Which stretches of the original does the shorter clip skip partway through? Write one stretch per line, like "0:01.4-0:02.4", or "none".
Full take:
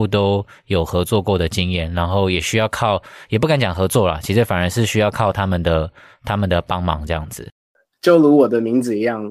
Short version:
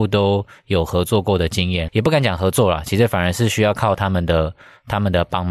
0:01.9-0:03.3